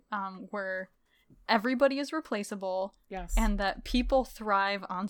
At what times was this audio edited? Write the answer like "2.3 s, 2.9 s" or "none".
none

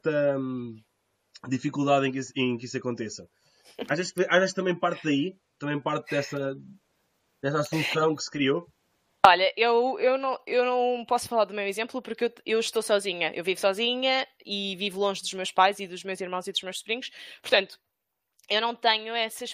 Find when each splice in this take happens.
none

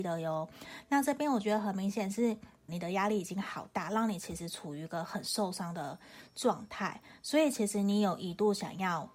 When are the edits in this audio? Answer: 2.7 s

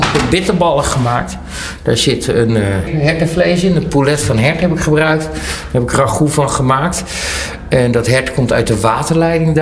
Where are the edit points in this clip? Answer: 2.9 s

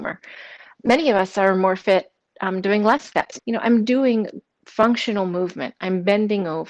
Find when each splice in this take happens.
3.4 s

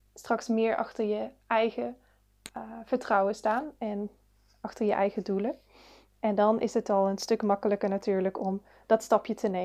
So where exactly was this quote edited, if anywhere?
none

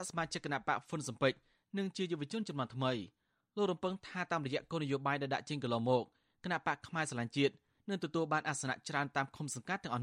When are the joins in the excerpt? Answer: none

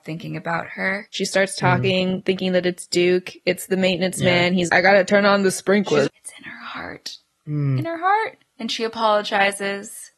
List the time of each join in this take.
1.1 s, 4.7 s, 6.1 s

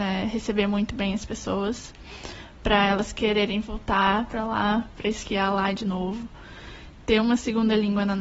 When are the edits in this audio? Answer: 7.0 s

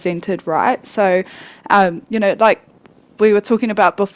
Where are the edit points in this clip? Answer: none

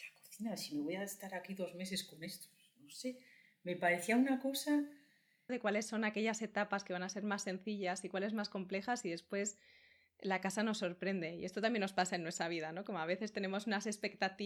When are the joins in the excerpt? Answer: 5.5 s

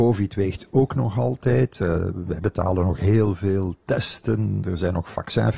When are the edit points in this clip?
none

